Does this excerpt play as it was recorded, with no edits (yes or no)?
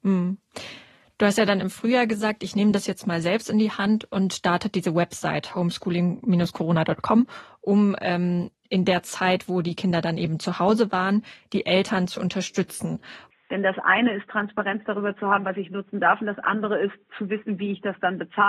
no